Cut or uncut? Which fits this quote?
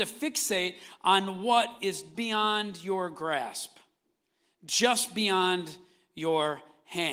cut